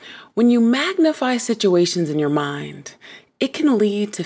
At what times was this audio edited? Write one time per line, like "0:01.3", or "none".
none